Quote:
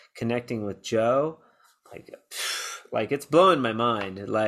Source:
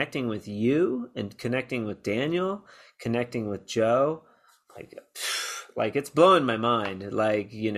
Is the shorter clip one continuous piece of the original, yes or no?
yes